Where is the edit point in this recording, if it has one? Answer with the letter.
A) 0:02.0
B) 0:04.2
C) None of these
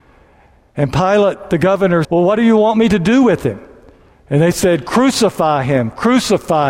A